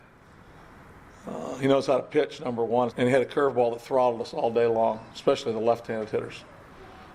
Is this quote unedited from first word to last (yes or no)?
no